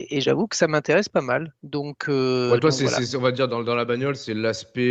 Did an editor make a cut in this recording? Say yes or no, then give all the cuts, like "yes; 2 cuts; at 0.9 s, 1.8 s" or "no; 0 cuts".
yes; 1 cut; at 1.6 s